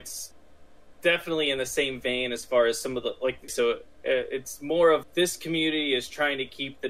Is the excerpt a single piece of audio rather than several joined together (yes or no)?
no